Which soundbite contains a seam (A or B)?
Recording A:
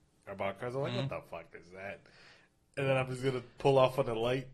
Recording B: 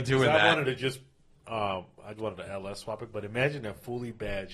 B